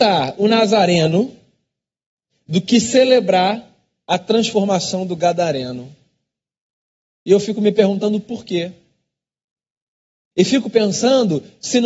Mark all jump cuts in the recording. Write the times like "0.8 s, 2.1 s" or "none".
none